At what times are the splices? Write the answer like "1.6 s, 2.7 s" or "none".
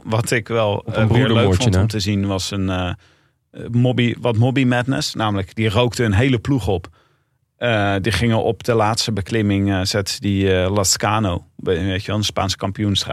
none